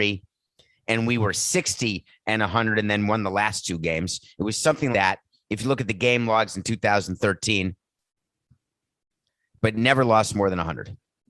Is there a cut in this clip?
yes; 1 cut; at 4.9 s

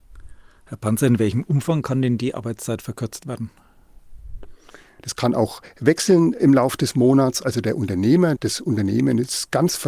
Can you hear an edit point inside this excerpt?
yes; 2 cuts; at 5.0 s, 8.4 s

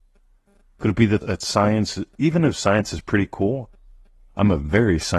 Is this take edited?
yes; 1 cut; at 1.2 s

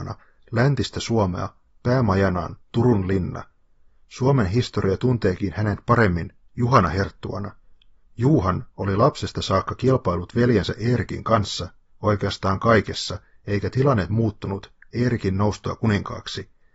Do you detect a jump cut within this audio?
no; 0 cuts

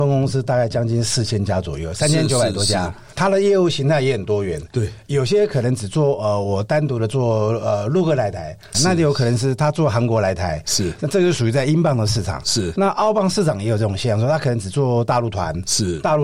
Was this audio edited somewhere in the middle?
yes; 1 cut; at 8.7 s

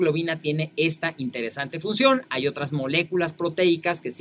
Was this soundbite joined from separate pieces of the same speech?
no; 0 cuts

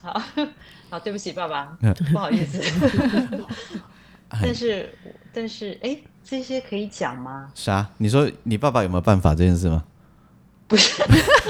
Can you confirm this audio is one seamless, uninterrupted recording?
yes; 0 cuts

